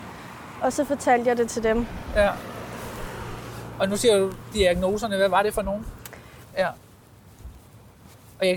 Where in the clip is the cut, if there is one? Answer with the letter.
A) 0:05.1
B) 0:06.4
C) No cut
B